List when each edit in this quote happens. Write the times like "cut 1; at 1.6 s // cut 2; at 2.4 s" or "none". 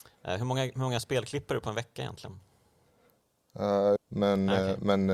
cut 1; at 4.0 s